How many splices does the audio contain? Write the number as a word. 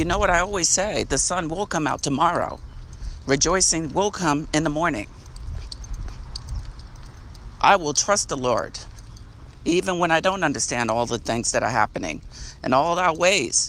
zero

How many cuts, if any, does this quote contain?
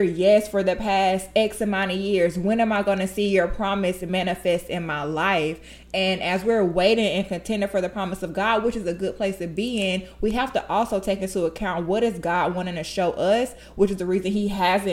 zero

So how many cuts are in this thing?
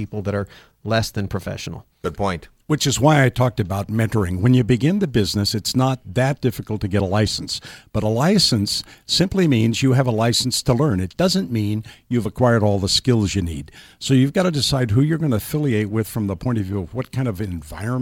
zero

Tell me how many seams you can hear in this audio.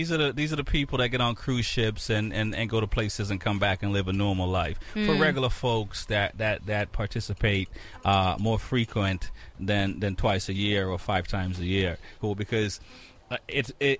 one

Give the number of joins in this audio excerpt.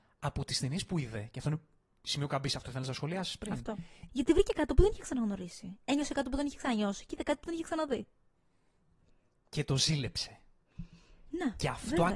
one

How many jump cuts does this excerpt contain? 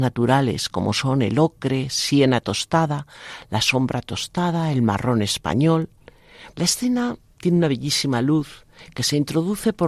one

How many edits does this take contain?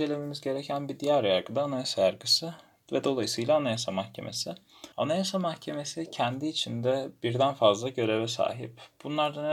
one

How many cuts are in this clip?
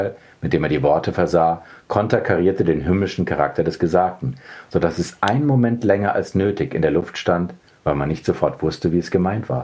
zero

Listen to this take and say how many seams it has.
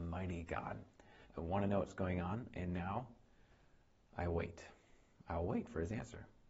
one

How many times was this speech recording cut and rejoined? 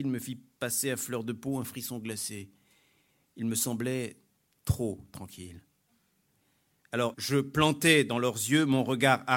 one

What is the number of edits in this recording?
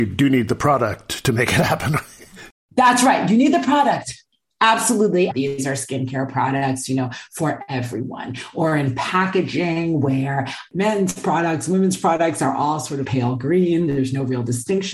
two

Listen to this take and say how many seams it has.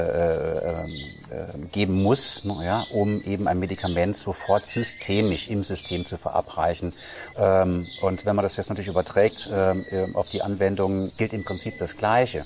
two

